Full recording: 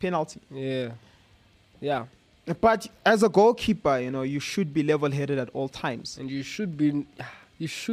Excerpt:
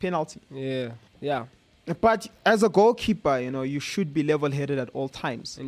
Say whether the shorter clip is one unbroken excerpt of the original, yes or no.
no